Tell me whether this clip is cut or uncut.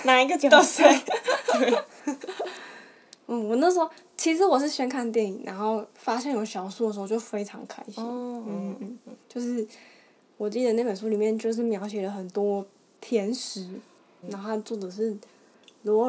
cut